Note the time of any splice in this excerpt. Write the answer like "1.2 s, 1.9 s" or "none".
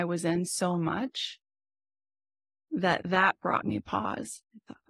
none